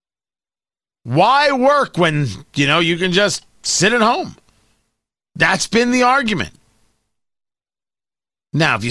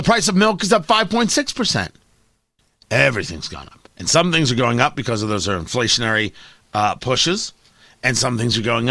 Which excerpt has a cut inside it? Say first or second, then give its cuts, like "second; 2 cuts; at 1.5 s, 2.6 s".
second; 1 cut; at 3.9 s